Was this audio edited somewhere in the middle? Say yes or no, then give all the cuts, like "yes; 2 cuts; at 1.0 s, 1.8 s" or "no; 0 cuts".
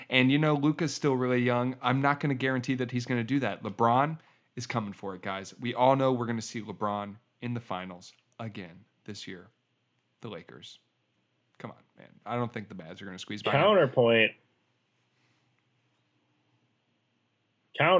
no; 0 cuts